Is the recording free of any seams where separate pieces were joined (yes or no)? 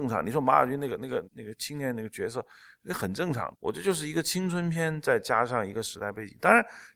no